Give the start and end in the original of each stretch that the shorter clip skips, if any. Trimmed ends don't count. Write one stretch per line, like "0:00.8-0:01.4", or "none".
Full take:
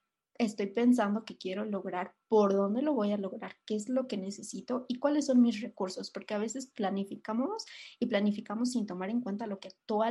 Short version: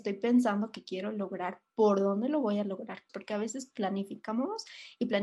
0:03.6-0:06.1